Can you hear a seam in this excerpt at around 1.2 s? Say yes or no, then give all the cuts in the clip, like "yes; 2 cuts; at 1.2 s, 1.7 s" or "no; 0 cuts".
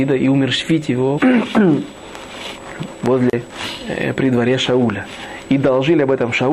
yes; 1 cut; at 1.2 s